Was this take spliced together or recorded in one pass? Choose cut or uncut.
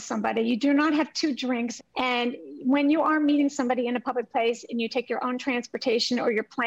cut